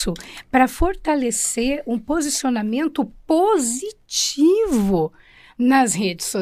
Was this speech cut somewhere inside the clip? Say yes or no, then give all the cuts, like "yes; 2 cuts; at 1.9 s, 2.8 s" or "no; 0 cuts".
no; 0 cuts